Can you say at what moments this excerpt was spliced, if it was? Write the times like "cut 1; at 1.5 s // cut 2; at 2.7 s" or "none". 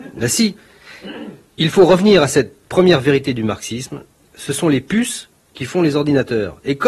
none